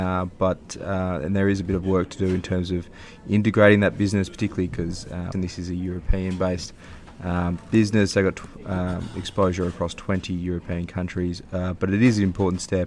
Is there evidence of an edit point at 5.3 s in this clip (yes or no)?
yes